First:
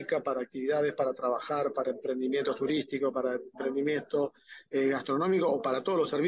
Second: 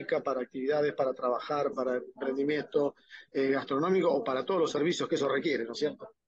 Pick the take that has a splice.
second; 1 cut; at 1.7 s

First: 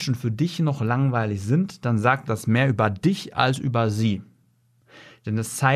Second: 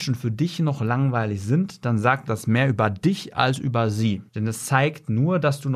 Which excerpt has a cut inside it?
second; 1 cut; at 4.3 s

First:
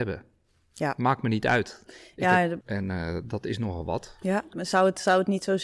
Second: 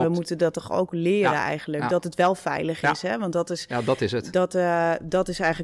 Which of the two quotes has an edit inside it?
first; 2 cuts; at 2.6 s, 4.5 s

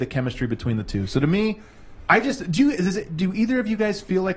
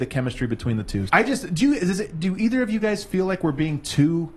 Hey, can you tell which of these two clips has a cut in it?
second; 1 cut; at 1.1 s

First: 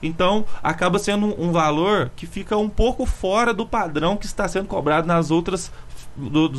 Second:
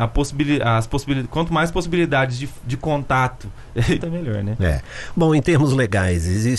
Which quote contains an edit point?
second; 1 cut; at 4.0 s

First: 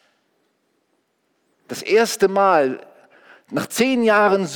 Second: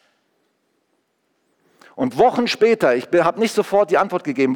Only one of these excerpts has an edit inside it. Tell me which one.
first; 1 cut; at 1.7 s

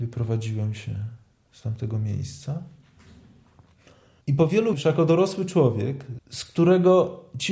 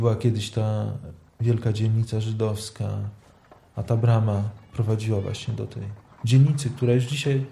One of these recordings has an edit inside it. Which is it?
first; 2 cuts; at 4.7 s, 6.2 s

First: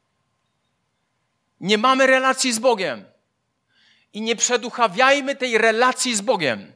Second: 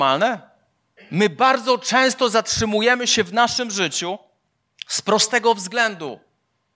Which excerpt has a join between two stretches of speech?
second; 1 cut; at 1.0 s

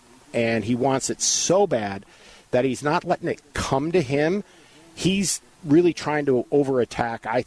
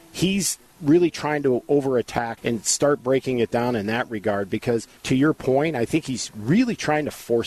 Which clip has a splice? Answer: second; 2 cuts; at 2.4 s, 5.0 s

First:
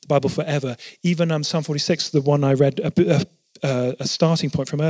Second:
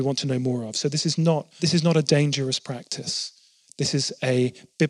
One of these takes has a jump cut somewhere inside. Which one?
second; 1 cut; at 1.6 s

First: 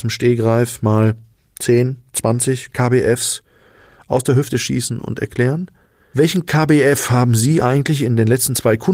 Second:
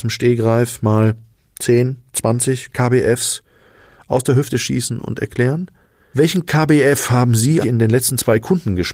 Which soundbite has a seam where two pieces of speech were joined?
second; 1 cut; at 7.6 s

